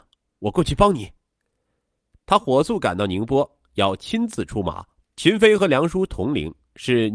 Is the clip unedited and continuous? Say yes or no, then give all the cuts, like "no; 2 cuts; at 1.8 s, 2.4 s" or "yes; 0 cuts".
no; 1 cut; at 5.0 s